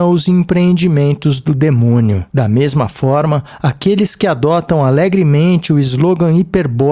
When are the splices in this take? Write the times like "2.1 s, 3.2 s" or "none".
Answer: 2.3 s